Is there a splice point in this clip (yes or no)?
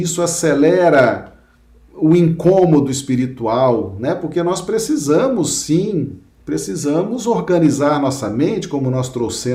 no